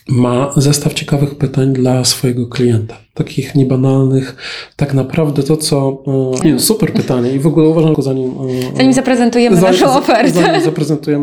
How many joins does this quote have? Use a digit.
2